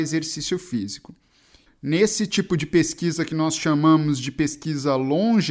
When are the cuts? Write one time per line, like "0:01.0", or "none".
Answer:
0:01.7